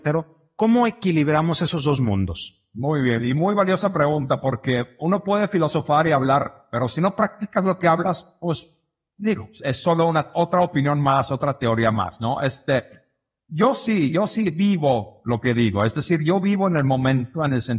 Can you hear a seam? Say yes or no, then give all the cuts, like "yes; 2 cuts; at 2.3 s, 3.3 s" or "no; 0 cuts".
no; 0 cuts